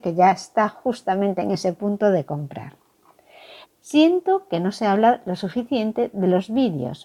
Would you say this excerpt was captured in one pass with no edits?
no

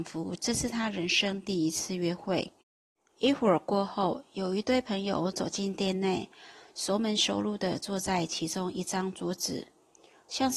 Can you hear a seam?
no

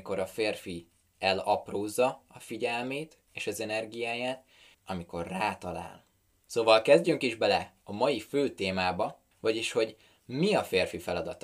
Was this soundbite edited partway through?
yes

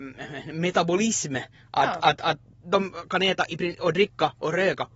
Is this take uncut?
yes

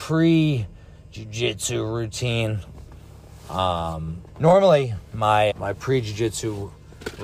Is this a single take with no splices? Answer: no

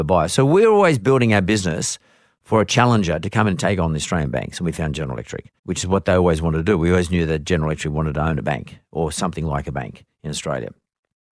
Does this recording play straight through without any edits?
no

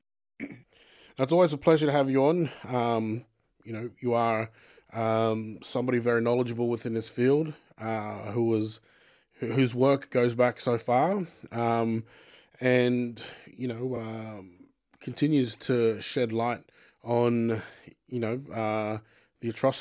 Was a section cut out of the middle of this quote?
no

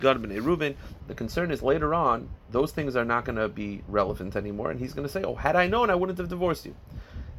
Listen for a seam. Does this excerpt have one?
yes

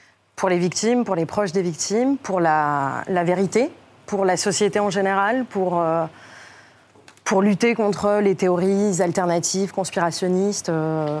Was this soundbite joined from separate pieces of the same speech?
no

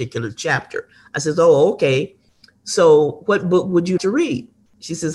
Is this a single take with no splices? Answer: no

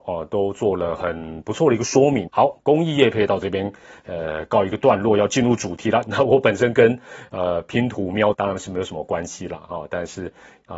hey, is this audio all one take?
no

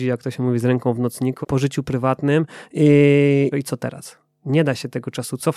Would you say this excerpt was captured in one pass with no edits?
no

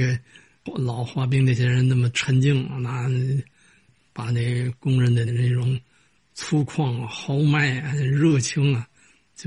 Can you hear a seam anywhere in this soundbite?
yes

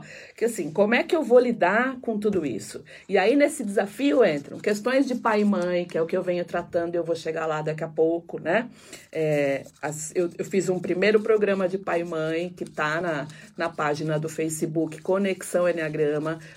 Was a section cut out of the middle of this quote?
no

